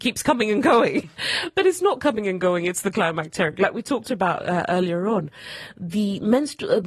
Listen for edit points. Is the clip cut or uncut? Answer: uncut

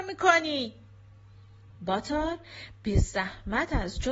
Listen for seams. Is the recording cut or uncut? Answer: uncut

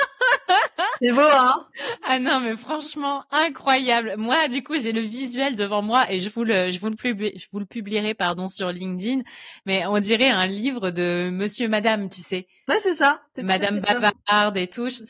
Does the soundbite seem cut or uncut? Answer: uncut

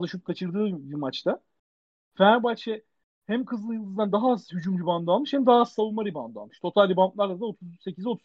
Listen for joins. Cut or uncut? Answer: uncut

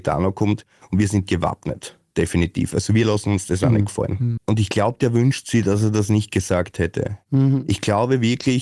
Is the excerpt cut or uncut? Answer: cut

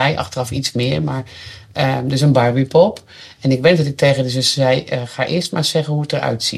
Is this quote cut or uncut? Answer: uncut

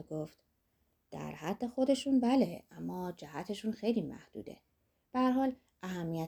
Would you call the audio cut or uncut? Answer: uncut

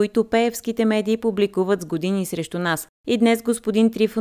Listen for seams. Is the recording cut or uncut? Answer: uncut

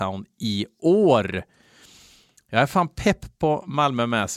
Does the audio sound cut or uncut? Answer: uncut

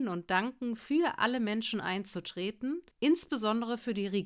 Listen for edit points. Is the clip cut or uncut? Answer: cut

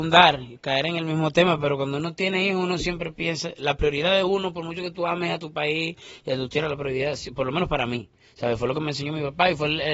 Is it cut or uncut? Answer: uncut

